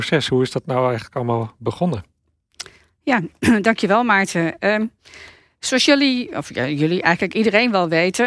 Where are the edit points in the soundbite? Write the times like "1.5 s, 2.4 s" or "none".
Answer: none